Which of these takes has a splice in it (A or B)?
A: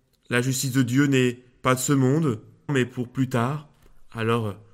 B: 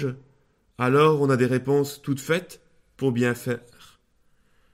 A